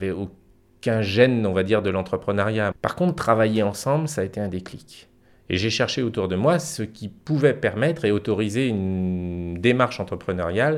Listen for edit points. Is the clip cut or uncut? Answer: cut